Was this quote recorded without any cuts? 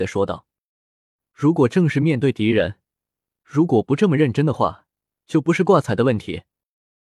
yes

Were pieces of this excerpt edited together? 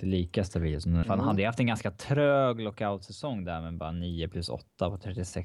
yes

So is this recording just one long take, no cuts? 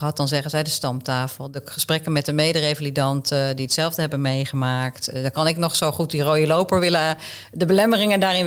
yes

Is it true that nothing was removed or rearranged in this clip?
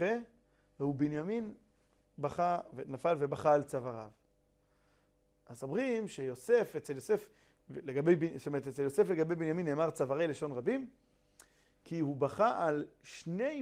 yes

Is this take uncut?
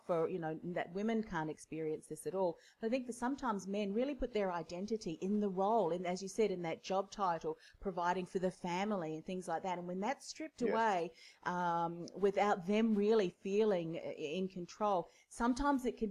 yes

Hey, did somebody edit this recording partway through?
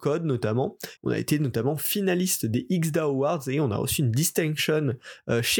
yes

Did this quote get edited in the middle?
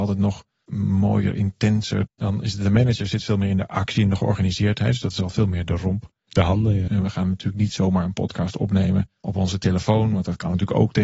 yes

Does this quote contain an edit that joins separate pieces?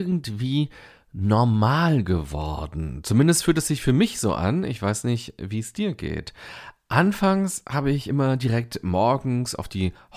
no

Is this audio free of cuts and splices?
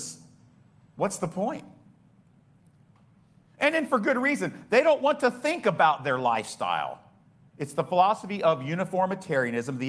no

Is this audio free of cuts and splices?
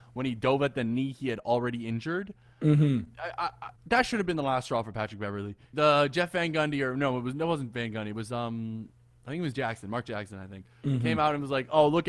no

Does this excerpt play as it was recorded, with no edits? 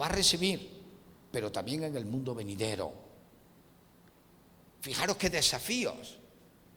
yes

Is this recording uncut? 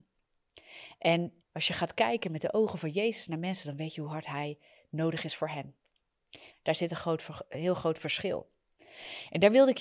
no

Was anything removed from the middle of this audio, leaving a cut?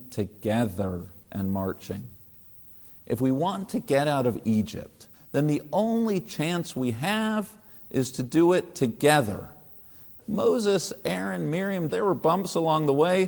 yes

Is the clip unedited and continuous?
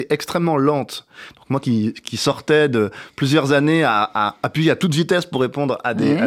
yes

